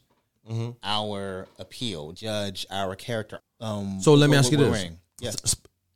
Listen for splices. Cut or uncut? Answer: cut